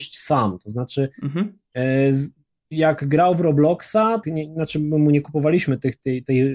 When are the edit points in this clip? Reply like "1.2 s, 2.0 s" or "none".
4.2 s

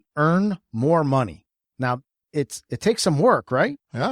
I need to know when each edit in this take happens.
1.6 s

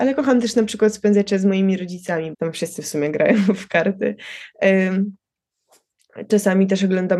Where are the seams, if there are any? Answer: 2.3 s

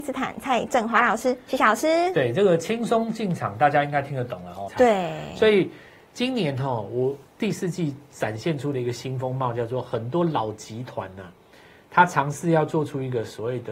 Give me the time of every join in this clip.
4.7 s

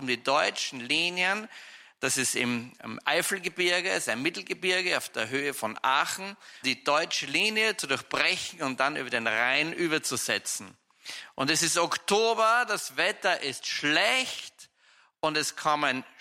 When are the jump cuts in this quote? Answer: 6.6 s

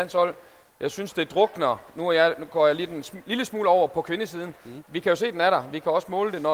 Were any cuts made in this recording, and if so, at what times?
4.8 s

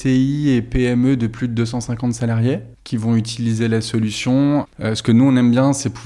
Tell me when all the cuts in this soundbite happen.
2.7 s, 4.7 s

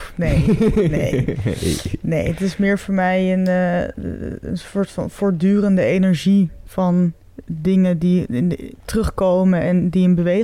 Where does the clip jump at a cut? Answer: none

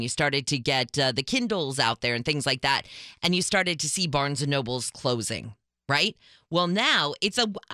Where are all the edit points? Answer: none

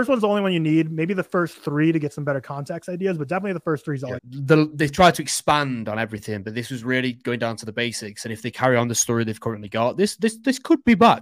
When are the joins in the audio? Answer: 4.2 s

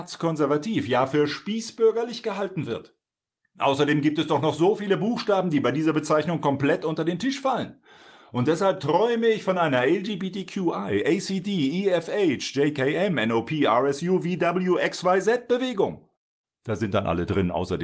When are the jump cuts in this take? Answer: none

